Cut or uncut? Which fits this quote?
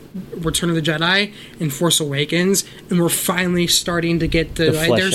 uncut